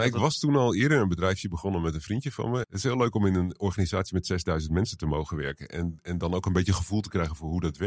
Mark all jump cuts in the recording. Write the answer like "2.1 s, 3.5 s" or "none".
2.6 s